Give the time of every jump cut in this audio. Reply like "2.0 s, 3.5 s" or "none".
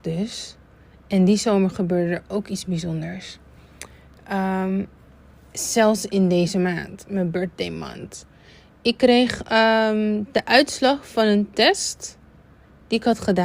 none